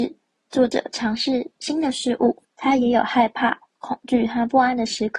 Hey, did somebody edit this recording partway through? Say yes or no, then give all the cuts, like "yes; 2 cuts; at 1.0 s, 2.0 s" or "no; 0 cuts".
yes; 1 cut; at 2.4 s